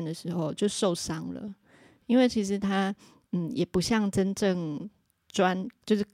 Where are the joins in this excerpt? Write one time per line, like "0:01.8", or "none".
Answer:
none